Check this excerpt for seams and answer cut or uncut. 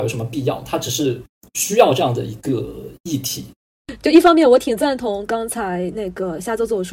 uncut